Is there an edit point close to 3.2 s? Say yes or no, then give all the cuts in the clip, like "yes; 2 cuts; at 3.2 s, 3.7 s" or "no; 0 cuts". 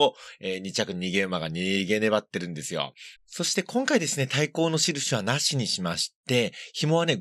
yes; 1 cut; at 3.2 s